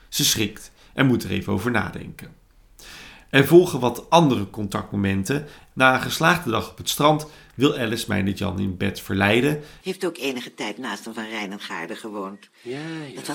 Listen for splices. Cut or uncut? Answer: cut